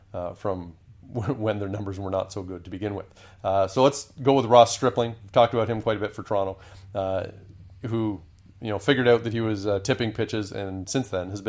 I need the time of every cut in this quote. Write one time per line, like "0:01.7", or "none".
none